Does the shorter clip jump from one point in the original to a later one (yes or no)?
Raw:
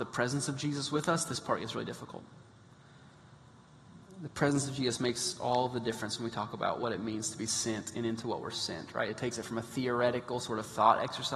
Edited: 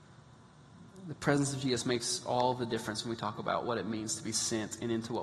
no